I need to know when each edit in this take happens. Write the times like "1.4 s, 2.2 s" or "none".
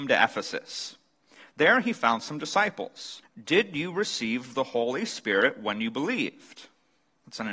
3.2 s